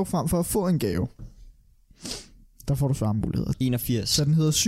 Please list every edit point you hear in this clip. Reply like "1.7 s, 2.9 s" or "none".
3.5 s